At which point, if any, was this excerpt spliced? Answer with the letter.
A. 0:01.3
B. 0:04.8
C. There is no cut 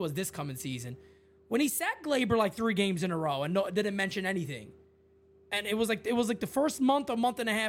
C